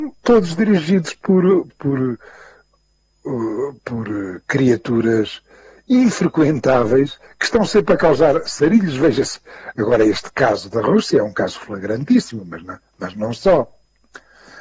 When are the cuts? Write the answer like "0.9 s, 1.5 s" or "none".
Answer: 1.7 s